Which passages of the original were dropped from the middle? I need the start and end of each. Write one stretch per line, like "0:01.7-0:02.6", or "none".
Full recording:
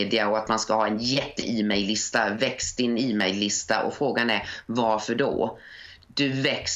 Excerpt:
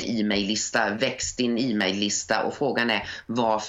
none